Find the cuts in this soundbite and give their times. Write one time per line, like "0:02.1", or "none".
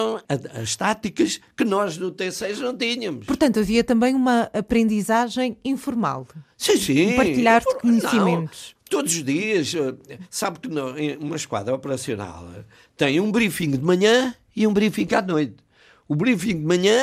none

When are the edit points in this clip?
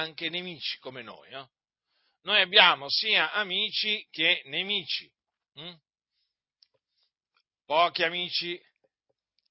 none

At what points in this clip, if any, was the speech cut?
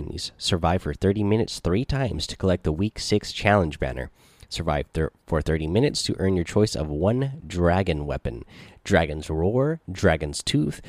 none

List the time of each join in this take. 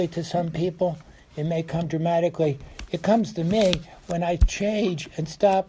none

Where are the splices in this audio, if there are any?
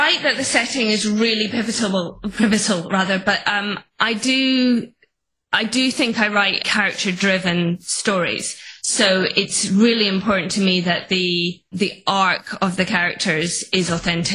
0:06.6
0:11.7

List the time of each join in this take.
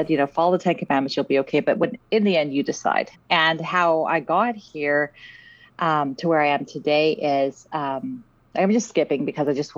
0:03.1

